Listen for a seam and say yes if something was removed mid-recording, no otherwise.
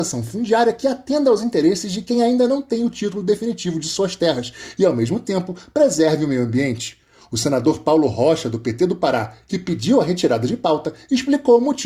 no